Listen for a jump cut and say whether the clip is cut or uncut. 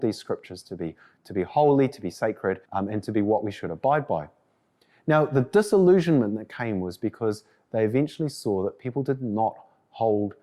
cut